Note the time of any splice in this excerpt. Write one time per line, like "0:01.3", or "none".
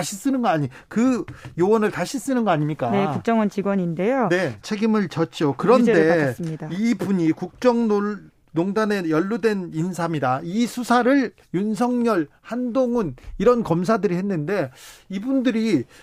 0:04.6